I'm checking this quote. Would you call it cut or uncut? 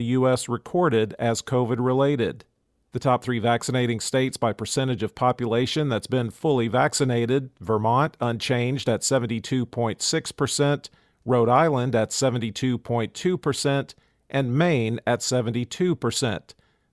uncut